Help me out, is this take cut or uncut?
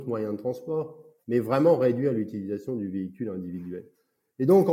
cut